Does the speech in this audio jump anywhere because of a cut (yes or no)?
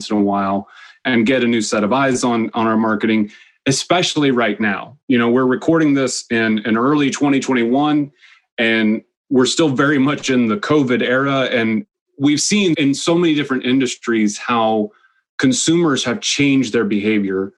no